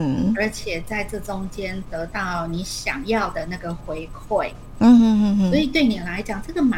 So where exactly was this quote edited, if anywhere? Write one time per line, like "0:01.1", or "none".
0:05.0